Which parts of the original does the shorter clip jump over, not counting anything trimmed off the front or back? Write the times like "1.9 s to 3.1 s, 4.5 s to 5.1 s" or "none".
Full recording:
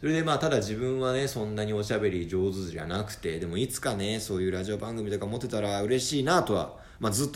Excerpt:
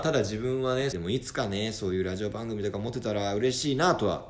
1.3 s to 3.4 s